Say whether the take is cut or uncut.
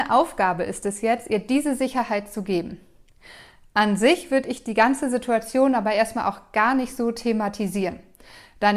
uncut